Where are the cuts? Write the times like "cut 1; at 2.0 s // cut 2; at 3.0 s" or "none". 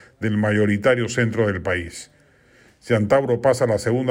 none